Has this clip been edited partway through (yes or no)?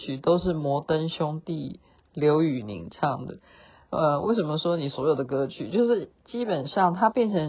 no